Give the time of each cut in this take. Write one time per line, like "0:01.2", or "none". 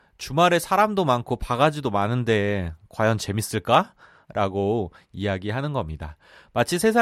0:04.2